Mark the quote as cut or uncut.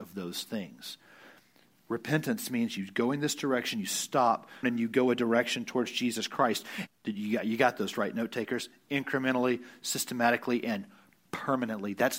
cut